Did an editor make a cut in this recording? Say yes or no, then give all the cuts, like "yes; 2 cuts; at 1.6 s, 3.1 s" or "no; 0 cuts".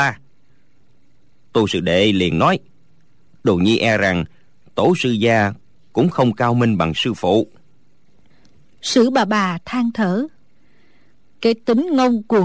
no; 0 cuts